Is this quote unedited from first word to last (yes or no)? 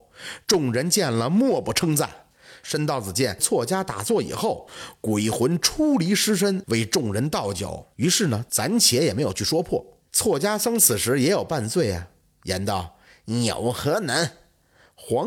no